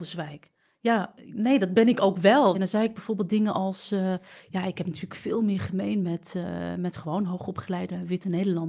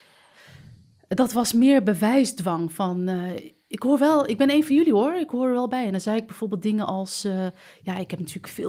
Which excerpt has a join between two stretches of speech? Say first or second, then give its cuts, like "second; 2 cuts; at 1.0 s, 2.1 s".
first; 1 cut; at 2.5 s